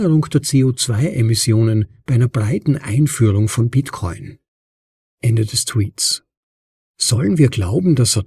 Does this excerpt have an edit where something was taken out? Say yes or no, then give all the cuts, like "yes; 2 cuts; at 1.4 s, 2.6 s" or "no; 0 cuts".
no; 0 cuts